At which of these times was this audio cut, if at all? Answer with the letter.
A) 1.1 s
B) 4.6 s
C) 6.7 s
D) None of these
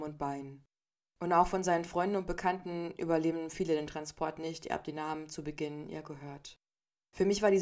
D